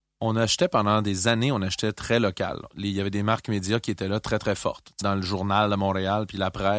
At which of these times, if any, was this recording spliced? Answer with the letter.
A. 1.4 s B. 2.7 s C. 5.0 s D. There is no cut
C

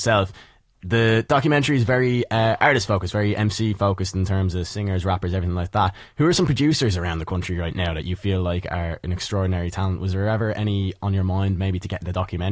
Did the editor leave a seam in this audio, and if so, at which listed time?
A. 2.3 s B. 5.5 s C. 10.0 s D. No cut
D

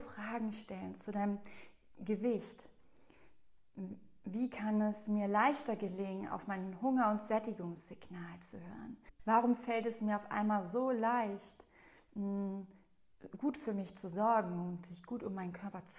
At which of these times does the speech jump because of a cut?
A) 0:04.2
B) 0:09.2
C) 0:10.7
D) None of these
B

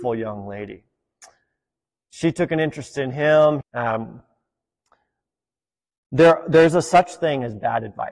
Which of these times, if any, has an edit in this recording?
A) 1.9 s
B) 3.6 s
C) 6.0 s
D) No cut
B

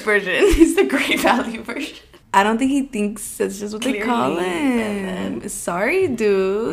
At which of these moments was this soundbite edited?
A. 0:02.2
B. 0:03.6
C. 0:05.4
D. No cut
A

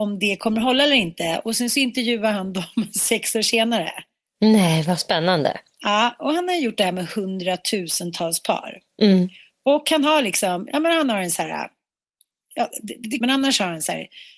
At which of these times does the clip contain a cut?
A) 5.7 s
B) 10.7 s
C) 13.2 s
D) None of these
C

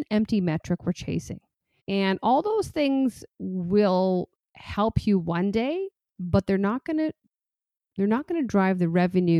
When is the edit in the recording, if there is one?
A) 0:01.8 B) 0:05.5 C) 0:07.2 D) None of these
A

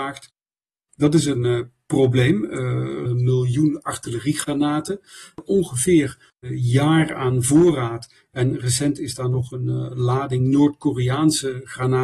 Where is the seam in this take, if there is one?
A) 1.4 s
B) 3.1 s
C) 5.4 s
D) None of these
B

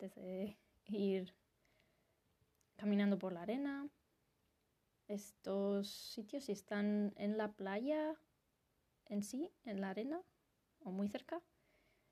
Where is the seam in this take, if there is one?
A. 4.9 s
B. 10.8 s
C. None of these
A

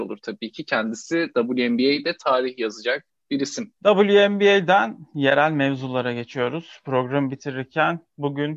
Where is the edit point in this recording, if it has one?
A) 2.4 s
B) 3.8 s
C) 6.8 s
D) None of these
B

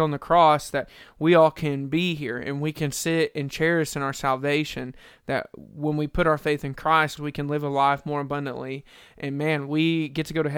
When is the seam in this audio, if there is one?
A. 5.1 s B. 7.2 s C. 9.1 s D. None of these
B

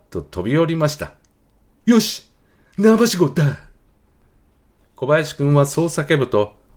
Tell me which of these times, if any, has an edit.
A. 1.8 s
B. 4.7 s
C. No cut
A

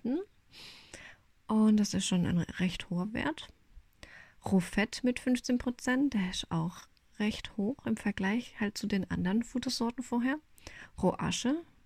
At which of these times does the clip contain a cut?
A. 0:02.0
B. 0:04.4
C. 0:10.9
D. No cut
C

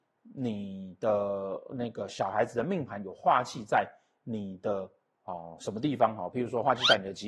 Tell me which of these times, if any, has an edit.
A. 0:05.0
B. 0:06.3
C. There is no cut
C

